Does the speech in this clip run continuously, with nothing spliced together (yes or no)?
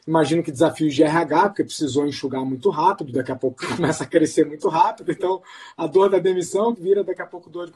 no